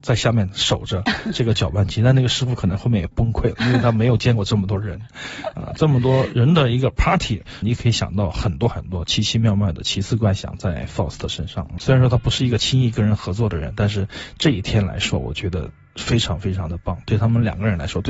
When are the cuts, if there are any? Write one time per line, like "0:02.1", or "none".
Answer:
0:07.6
0:11.8